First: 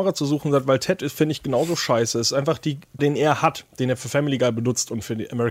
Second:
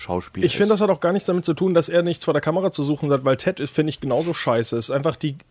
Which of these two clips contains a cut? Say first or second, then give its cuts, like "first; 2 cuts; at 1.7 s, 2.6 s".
first; 1 cut; at 3.0 s